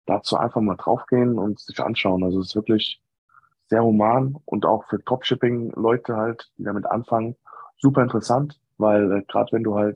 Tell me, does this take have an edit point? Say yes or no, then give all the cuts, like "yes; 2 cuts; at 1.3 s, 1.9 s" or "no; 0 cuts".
yes; 2 cuts; at 3.5 s, 8.7 s